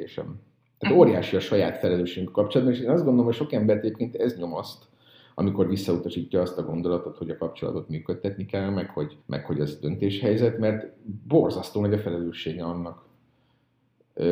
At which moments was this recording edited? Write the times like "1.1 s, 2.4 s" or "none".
9.2 s